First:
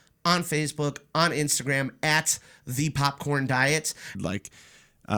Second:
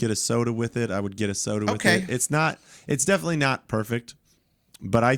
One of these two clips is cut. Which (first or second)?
first